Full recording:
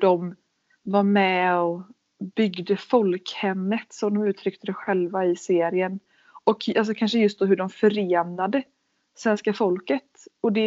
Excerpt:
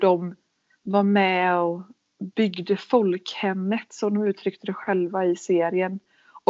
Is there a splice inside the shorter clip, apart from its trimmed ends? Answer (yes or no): no